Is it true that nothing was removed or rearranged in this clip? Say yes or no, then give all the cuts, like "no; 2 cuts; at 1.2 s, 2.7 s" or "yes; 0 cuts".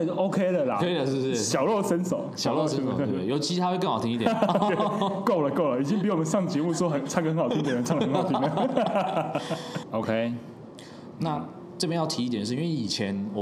no; 2 cuts; at 9.8 s, 11.1 s